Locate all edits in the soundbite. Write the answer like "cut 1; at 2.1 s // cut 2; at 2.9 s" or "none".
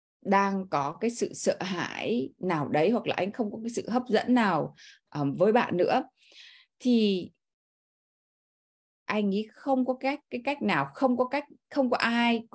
none